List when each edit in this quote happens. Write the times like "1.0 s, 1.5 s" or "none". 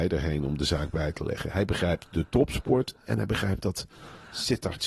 none